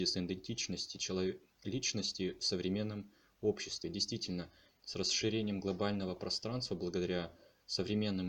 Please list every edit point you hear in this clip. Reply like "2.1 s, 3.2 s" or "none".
none